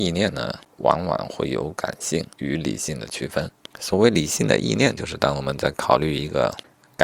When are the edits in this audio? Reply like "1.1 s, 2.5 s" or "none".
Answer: none